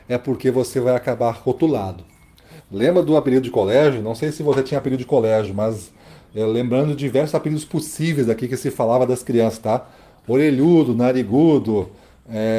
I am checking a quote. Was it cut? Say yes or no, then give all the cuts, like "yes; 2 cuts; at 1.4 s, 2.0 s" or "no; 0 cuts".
yes; 1 cut; at 2.6 s